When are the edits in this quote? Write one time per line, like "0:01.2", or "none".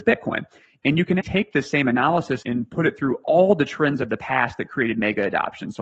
0:01.2
0:02.4